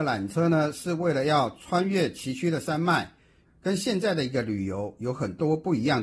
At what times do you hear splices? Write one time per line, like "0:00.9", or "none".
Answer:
0:03.4